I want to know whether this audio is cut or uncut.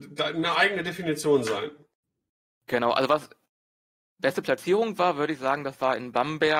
uncut